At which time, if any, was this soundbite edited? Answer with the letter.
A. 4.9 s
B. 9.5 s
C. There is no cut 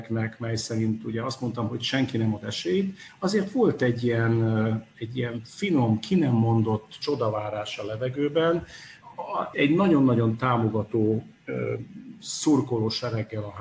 B